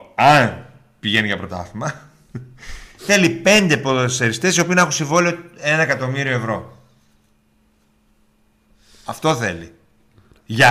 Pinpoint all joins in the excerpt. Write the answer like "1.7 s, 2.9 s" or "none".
none